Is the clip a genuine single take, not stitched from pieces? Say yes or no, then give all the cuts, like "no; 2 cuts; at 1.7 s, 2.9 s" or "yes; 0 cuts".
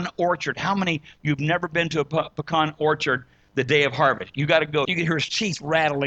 no; 1 cut; at 4.9 s